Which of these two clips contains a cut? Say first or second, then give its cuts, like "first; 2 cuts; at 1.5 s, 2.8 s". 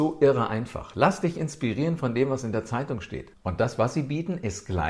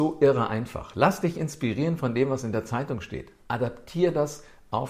first; 1 cut; at 3.3 s